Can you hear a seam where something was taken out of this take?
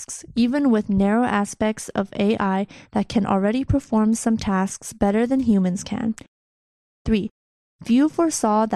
no; 0 cuts

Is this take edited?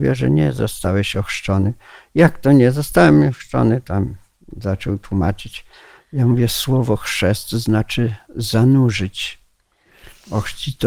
no; 0 cuts

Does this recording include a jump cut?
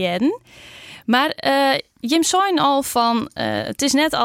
no; 0 cuts

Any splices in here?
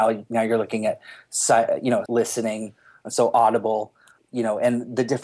yes; 2 cuts; at 2.1 s, 4.2 s

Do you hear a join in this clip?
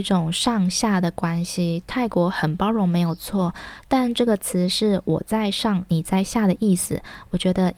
no; 0 cuts

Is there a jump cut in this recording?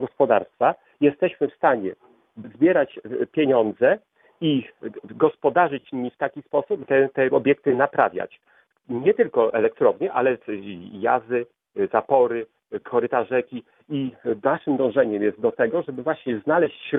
yes; 1 cut; at 6.8 s

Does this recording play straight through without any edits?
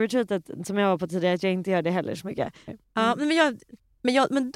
no; 1 cut; at 2.7 s

